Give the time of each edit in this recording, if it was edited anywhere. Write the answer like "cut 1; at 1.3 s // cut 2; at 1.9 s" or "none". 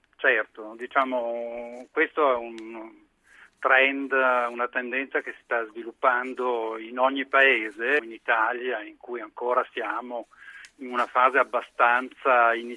cut 1; at 8.0 s